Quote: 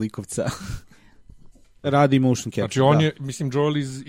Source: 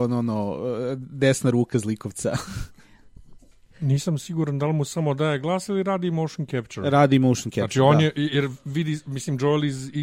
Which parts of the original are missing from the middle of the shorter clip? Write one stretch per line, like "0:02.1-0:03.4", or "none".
0:03.7-0:06.8
0:08.1-0:09.0

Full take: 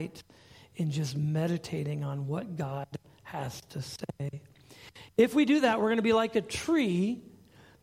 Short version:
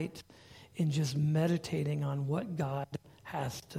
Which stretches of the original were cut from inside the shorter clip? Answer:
none

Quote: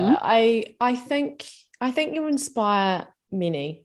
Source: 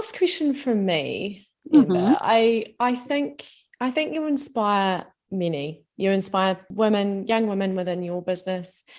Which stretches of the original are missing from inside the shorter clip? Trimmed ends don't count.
none

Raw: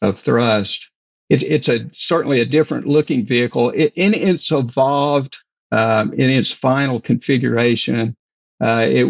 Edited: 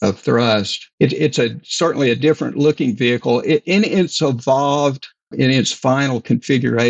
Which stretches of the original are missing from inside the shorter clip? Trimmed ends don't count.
0:00.9-0:01.2
0:05.6-0:06.1

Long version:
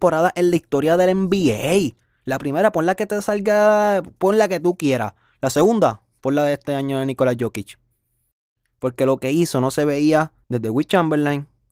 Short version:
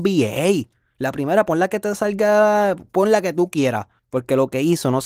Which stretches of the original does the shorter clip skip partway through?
0:05.2-0:08.7

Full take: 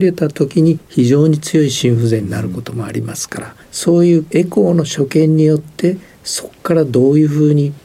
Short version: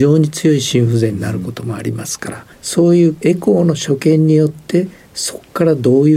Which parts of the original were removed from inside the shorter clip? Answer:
none

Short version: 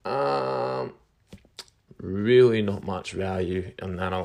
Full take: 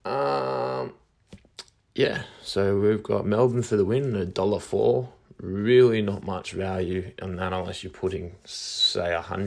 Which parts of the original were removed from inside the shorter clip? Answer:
0:01.9-0:05.3

